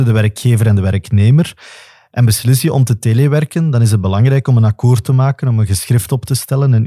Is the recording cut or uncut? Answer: uncut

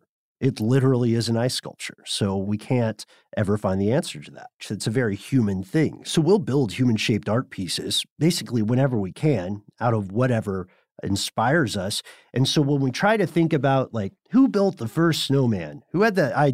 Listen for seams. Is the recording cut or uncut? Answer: cut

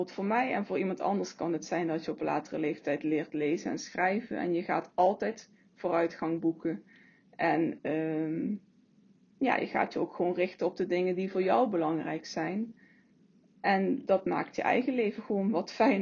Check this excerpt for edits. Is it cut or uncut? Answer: uncut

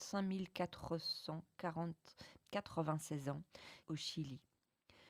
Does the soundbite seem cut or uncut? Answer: cut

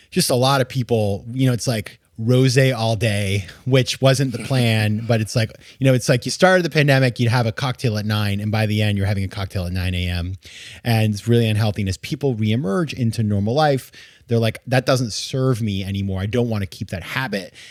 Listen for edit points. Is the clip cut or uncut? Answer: uncut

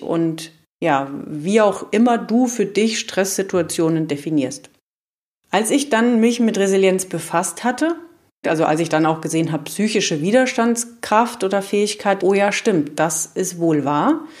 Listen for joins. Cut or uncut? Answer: cut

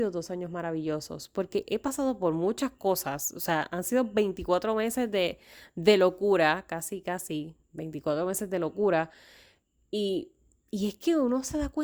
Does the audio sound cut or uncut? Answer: cut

